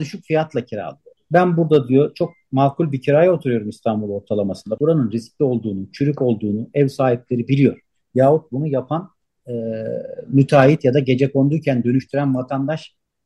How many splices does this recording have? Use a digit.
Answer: 2